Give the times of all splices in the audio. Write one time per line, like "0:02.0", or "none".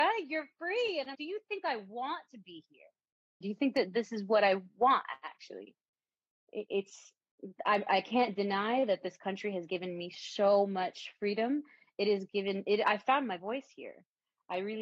0:01.1
0:03.4